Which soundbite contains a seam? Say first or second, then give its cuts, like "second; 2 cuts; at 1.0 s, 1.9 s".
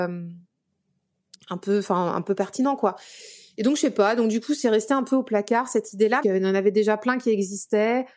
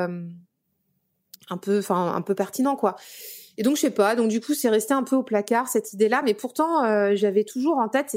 first; 1 cut; at 6.2 s